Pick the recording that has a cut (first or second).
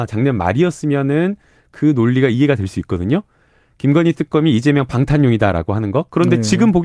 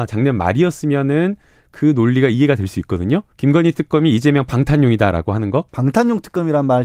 second